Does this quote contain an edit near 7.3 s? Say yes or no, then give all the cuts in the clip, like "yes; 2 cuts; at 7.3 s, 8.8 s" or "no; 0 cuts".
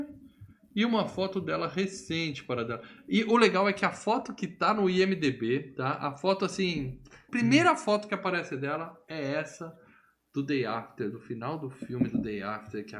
yes; 1 cut; at 7.3 s